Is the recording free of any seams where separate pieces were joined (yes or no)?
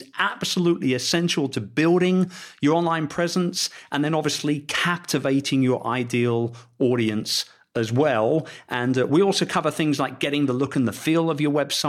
yes